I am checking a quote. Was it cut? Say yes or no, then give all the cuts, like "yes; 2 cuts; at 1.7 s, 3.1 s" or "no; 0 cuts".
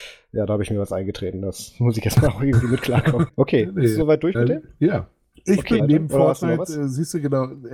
yes; 2 cuts; at 3.3 s, 5.8 s